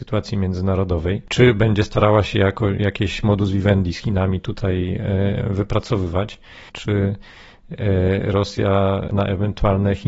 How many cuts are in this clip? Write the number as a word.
two